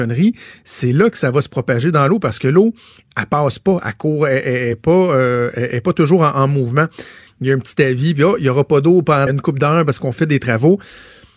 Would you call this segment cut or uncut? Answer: cut